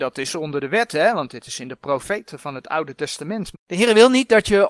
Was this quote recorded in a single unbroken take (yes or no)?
no